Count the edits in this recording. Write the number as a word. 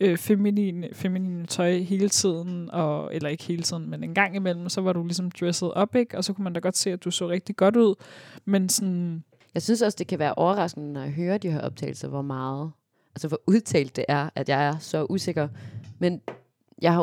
zero